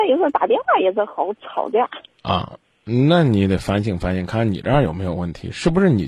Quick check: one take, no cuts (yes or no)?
yes